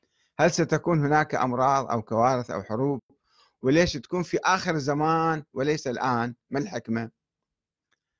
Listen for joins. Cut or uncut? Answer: uncut